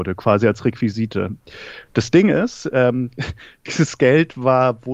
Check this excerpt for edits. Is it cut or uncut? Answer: uncut